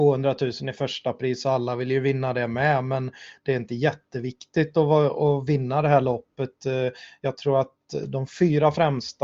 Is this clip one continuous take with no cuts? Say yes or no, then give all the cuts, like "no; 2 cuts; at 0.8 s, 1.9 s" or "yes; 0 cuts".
yes; 0 cuts